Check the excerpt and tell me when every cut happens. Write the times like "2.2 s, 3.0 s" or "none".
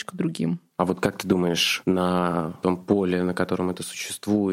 none